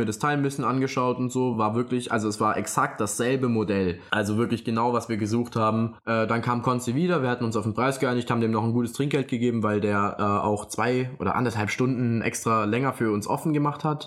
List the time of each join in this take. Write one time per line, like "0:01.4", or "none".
none